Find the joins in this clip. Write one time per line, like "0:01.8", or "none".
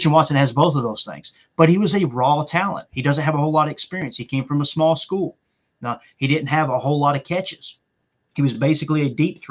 none